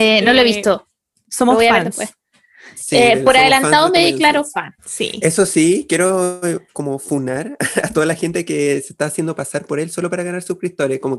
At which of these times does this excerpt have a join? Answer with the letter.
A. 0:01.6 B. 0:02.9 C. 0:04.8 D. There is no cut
C